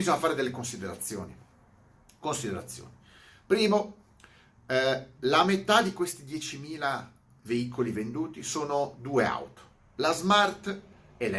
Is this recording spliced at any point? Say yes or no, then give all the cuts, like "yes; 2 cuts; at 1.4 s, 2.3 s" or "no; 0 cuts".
no; 0 cuts